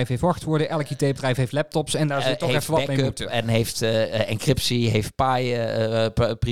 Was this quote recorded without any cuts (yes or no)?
yes